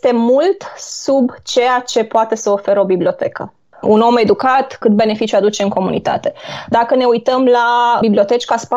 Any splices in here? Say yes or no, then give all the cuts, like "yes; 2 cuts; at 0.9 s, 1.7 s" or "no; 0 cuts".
yes; 2 cuts; at 3.7 s, 6.7 s